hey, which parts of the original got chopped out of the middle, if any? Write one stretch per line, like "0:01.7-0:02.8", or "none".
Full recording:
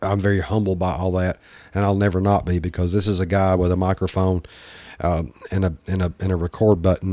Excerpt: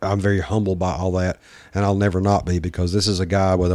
none